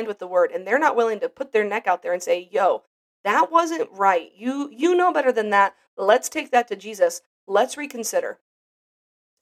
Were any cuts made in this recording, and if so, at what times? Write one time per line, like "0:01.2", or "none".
none